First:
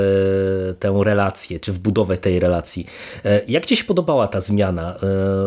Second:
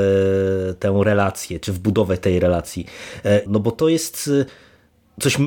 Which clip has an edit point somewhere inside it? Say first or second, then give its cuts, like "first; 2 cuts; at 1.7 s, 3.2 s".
second; 1 cut; at 3.5 s